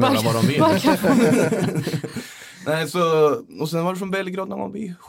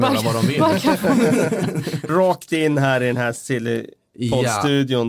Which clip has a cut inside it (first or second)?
second